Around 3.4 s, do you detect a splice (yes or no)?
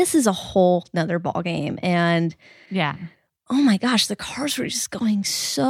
no